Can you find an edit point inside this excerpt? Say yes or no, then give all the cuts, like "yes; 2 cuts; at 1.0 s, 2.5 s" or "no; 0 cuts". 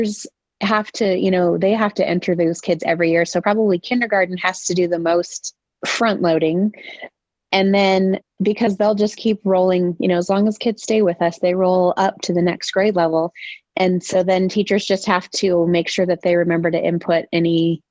no; 0 cuts